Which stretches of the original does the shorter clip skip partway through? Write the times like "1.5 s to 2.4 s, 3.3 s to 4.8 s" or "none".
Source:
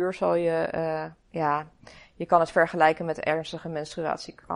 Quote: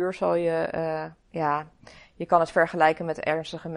none